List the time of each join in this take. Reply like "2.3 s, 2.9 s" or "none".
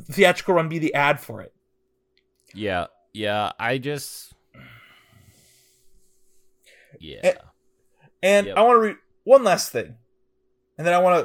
none

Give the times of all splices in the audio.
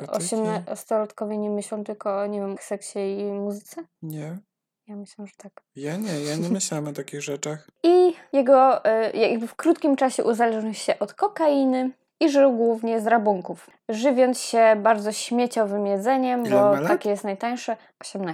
2.6 s

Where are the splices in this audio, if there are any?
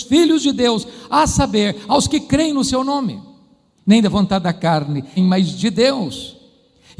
3.8 s, 5.2 s

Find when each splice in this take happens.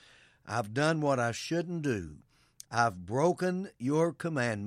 2.6 s

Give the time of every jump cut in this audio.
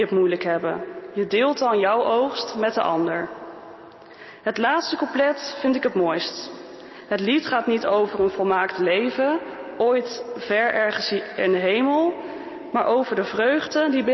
none

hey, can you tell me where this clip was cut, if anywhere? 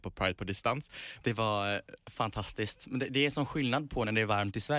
1.2 s

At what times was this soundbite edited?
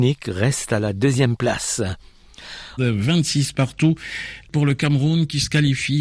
2.8 s, 4.4 s

